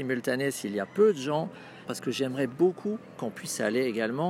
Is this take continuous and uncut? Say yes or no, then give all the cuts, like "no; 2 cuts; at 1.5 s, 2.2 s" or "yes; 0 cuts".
no; 1 cut; at 1.9 s